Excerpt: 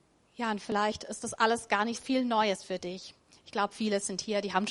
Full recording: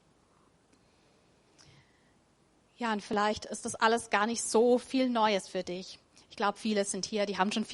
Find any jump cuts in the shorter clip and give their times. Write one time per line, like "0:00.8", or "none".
0:01.9